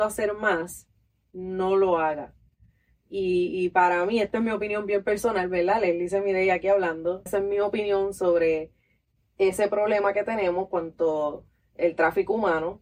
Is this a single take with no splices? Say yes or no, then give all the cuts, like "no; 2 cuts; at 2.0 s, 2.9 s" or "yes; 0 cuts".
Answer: no; 1 cut; at 7.3 s